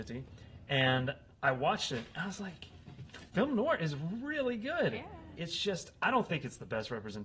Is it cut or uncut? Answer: cut